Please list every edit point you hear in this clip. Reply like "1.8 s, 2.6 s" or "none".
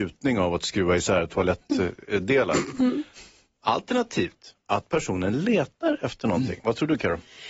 none